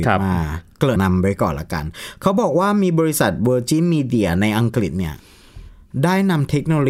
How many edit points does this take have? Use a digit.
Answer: 1